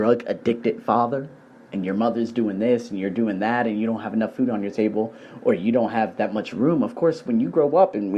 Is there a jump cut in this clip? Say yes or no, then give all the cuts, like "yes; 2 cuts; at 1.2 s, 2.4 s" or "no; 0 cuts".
no; 0 cuts